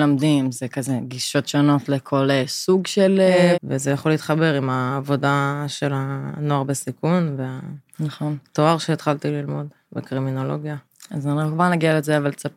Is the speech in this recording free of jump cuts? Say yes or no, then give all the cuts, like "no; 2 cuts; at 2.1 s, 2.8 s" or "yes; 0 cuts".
no; 1 cut; at 3.5 s